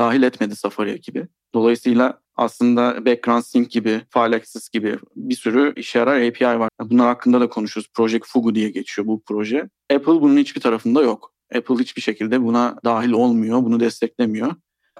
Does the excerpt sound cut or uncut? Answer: cut